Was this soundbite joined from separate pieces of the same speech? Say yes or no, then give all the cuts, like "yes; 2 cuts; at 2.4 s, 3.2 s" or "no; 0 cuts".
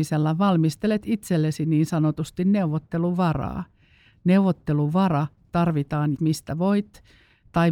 yes; 1 cut; at 6.1 s